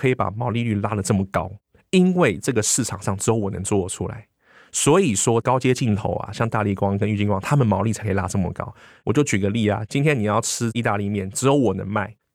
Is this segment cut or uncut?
uncut